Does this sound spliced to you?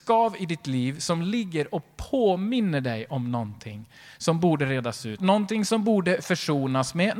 yes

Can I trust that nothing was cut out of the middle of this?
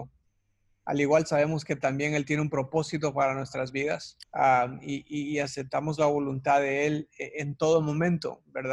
no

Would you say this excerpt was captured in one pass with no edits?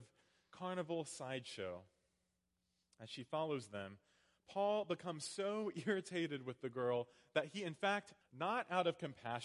no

